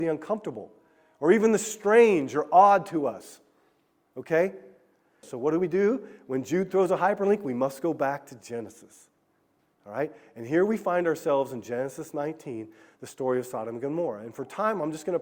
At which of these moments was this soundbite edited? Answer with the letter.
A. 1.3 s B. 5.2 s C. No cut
B